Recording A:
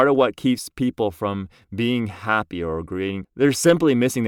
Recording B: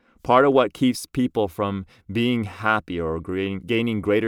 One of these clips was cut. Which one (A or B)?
A